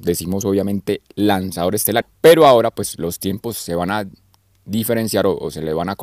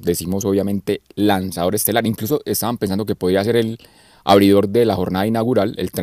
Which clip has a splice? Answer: first; 1 cut; at 2.0 s

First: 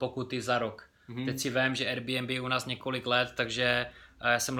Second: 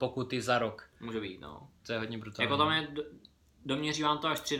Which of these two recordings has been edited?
second; 1 cut; at 0.9 s

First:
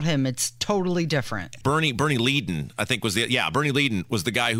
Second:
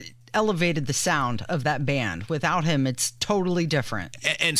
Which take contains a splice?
first; 1 cut; at 1.6 s

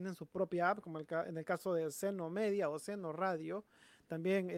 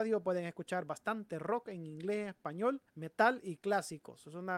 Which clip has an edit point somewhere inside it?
second; 1 cut; at 2.9 s

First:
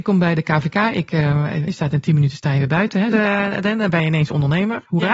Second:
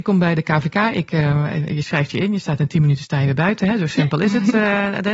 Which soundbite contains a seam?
first; 2 cuts; at 1.7 s, 3.1 s

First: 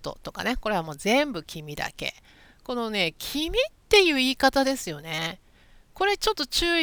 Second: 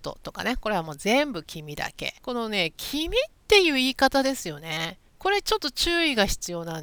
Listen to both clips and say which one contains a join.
second; 2 cuts; at 2.2 s, 5.1 s

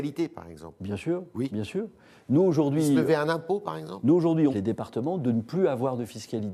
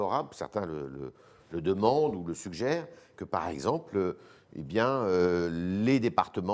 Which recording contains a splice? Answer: first; 1 cut; at 4.5 s

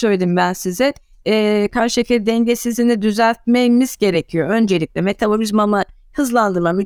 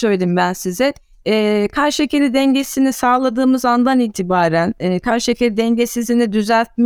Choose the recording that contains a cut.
first; 1 cut; at 1.7 s

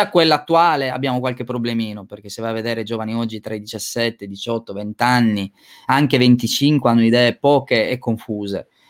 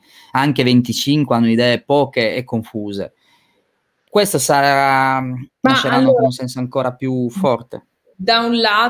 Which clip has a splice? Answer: second; 2 cuts; at 4.1 s, 5.5 s

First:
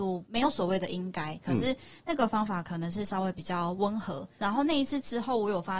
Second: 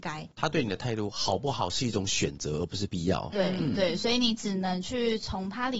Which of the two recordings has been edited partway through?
first; 2 cuts; at 1.4 s, 4.4 s

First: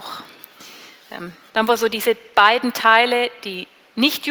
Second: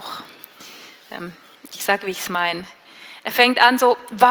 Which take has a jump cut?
first; 1 cut; at 1.5 s

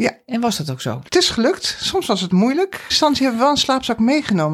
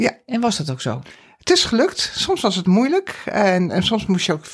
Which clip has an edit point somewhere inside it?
first; 2 cuts; at 1.1 s, 2.9 s

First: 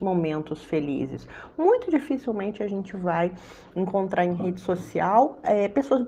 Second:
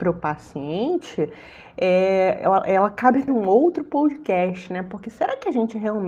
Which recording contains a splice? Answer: second; 1 cut; at 3.3 s

